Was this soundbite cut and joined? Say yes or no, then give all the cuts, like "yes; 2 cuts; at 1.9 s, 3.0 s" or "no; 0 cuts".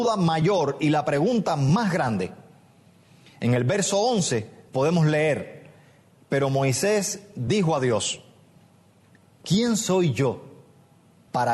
no; 0 cuts